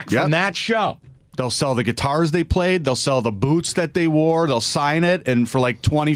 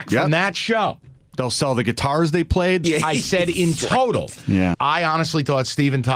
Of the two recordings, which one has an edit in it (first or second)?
second